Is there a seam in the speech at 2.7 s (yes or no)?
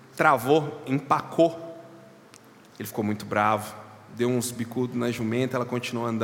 no